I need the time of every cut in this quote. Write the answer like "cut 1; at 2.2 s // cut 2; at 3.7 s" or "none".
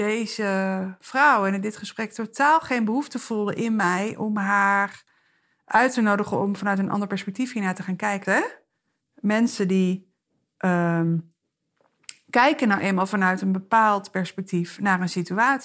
cut 1; at 8.2 s